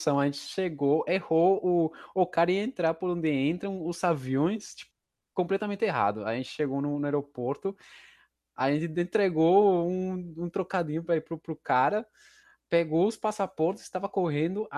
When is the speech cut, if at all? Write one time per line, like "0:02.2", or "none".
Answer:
none